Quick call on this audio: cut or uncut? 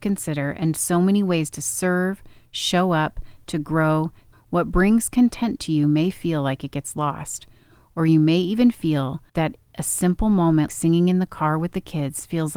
cut